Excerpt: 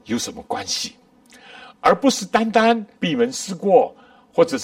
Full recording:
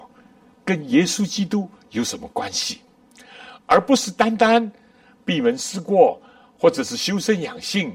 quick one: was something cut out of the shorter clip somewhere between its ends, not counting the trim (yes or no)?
yes